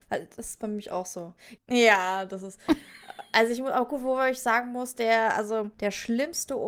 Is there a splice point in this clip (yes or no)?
yes